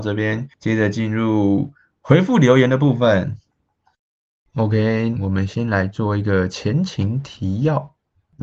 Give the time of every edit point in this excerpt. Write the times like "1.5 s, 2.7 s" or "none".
5.2 s